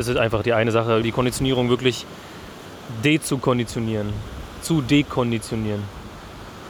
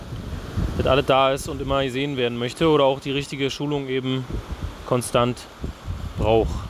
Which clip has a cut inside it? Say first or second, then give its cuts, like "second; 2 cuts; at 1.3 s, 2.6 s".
first; 1 cut; at 1.0 s